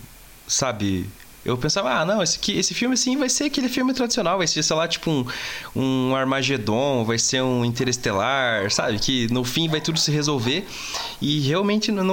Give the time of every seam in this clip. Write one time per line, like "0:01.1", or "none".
none